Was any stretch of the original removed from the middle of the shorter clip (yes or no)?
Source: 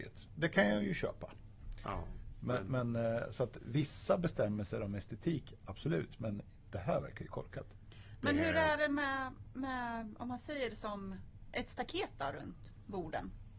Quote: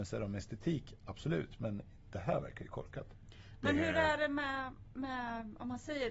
no